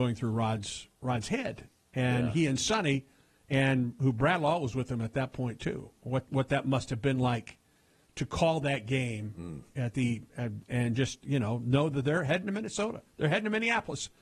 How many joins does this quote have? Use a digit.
0